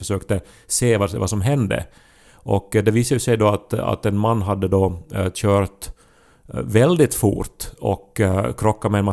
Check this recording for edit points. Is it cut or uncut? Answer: uncut